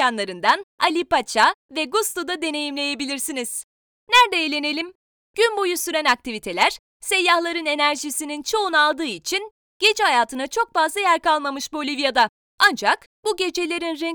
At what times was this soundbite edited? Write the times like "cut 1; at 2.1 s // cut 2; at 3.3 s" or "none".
none

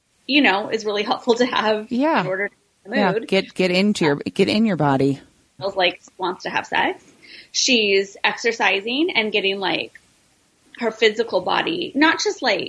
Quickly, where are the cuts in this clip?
cut 1; at 5.6 s

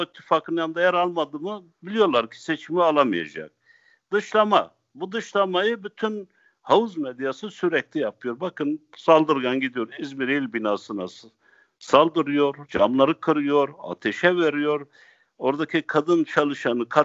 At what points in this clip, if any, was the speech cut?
none

